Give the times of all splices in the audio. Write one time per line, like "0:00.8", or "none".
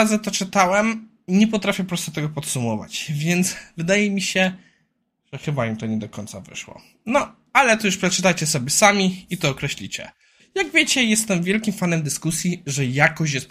0:10.4